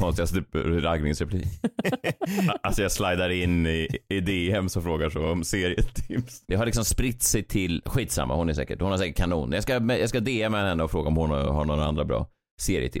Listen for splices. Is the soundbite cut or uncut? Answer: cut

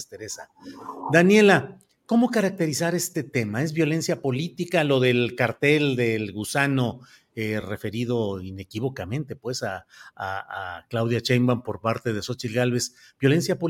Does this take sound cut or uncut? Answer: uncut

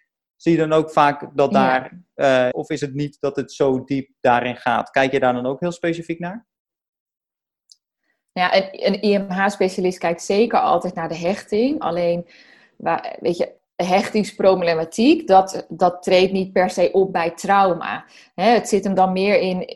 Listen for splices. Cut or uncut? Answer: cut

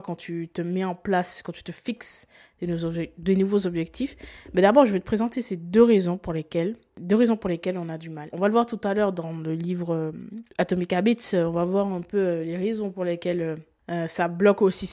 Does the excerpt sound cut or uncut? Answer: cut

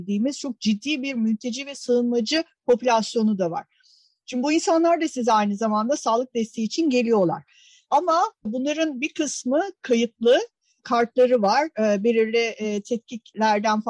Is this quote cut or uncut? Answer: cut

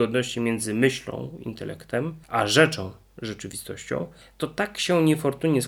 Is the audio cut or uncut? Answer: cut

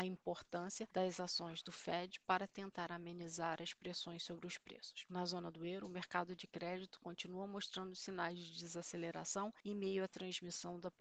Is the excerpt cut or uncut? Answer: uncut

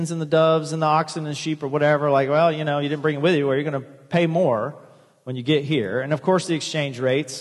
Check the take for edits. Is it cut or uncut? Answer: uncut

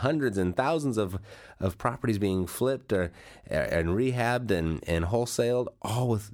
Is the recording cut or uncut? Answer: uncut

